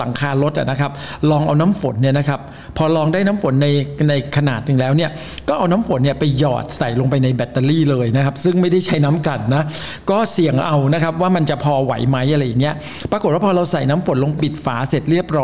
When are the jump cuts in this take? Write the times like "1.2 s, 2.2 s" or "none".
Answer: 14.4 s